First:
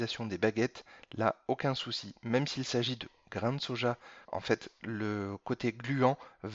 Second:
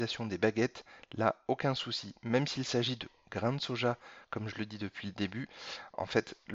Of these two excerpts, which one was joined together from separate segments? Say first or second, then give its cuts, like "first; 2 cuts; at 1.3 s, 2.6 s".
first; 1 cut; at 4.2 s